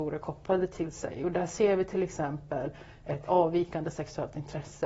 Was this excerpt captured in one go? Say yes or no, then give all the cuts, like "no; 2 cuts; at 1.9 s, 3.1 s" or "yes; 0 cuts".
yes; 0 cuts